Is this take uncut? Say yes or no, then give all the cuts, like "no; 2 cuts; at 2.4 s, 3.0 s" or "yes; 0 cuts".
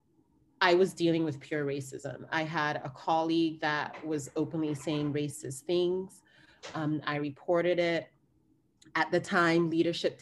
yes; 0 cuts